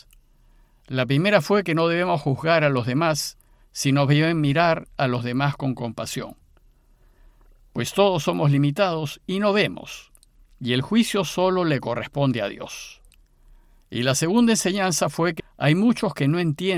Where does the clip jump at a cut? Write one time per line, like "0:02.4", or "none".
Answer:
0:15.4